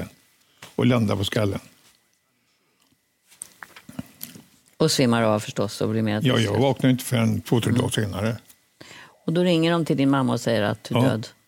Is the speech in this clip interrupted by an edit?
no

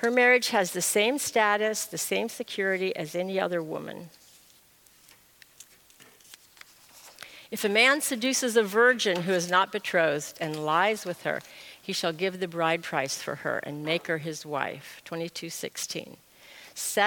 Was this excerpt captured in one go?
yes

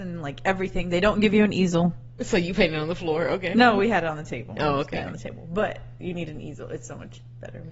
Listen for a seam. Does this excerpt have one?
yes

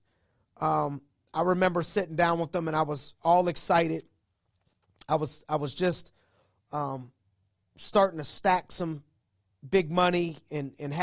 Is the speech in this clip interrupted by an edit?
no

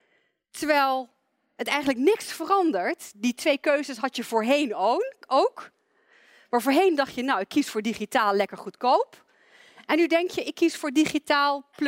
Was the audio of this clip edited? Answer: no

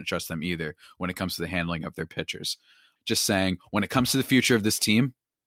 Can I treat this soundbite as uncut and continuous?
no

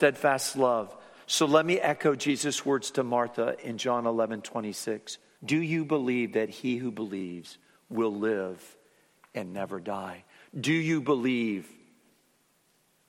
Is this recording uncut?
no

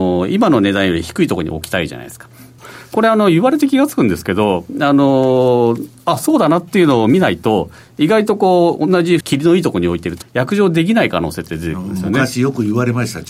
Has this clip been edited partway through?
yes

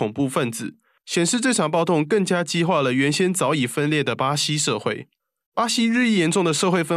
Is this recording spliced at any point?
no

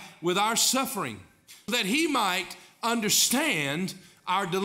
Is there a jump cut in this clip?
yes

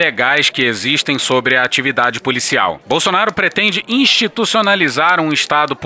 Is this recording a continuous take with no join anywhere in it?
no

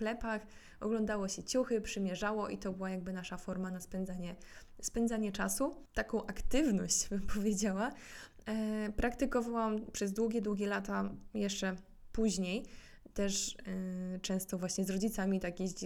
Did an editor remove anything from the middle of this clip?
no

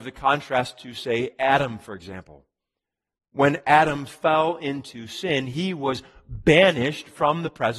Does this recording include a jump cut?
no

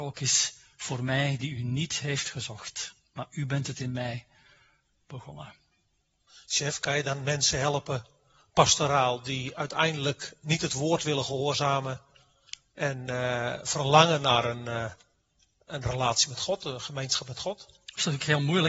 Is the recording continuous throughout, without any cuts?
yes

